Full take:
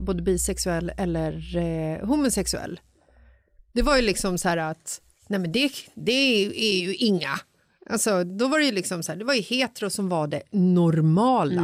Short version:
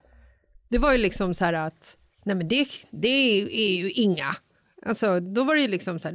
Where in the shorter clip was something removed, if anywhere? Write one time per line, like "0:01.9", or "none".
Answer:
none